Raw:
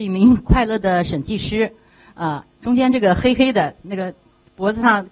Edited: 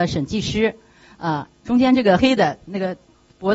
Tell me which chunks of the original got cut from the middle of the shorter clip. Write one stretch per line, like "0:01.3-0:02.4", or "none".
0:03.2-0:03.4